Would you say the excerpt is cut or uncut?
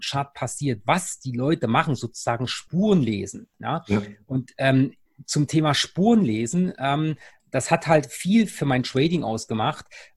uncut